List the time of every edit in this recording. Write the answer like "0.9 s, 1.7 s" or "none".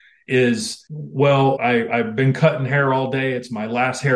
1.6 s